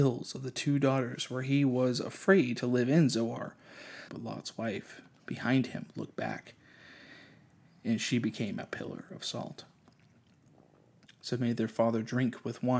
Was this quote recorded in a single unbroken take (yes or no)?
no